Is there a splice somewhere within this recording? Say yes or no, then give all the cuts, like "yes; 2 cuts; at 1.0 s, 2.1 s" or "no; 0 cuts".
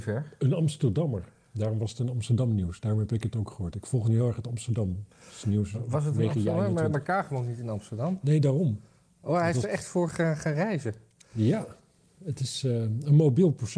no; 0 cuts